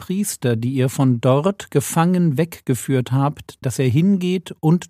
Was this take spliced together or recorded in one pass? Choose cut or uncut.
cut